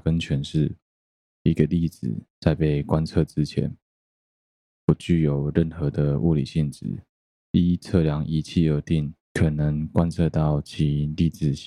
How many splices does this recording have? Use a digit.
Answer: 2